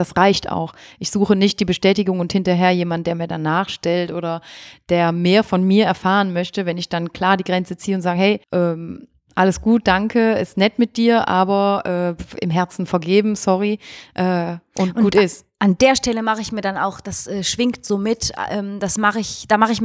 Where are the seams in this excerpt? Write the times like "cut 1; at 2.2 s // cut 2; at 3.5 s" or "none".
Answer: cut 1; at 8.4 s